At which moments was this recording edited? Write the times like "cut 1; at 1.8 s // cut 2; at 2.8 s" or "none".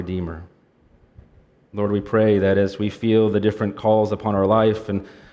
cut 1; at 1.6 s